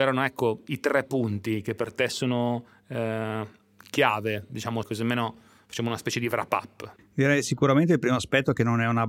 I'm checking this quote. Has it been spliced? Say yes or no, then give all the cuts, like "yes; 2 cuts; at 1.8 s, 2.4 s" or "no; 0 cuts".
yes; 2 cuts; at 4.8 s, 7.0 s